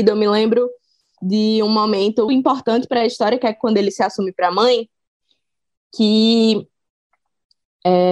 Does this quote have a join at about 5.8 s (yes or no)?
no